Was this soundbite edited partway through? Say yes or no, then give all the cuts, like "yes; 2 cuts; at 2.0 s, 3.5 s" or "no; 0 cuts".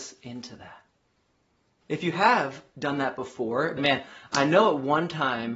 yes; 2 cuts; at 1.8 s, 3.8 s